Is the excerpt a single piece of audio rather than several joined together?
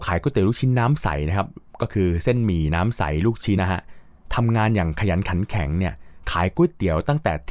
no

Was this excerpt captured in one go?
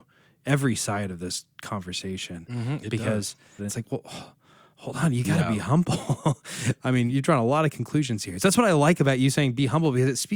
no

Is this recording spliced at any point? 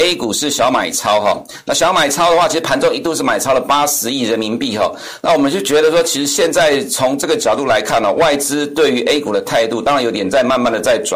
no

